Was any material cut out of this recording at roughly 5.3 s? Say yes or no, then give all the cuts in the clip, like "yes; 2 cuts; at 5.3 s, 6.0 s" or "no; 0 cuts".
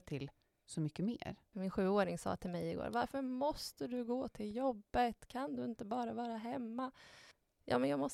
no; 1 cut; at 1.5 s